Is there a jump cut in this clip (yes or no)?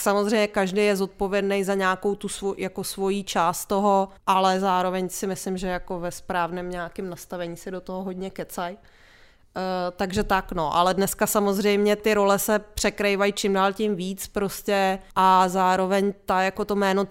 yes